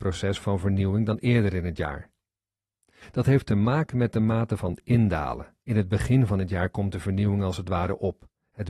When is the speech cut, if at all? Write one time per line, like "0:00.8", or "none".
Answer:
0:05.6